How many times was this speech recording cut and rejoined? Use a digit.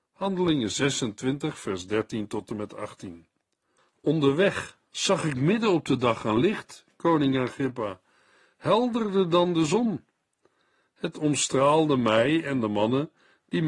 0